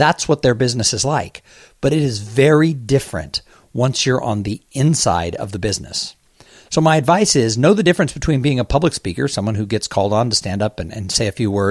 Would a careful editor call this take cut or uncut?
uncut